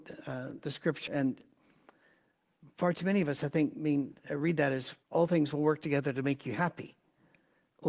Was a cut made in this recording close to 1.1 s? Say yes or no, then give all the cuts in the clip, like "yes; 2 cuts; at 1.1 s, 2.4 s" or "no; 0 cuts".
yes; 2 cuts; at 1.1 s, 5.0 s